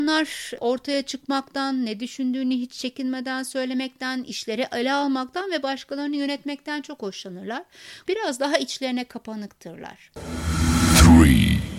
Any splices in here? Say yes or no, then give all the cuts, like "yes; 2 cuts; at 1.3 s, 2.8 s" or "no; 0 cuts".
yes; 1 cut; at 8.1 s